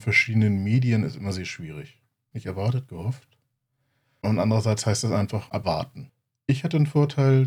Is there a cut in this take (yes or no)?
yes